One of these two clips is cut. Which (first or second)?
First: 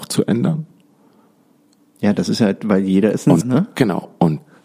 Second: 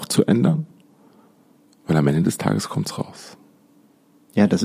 first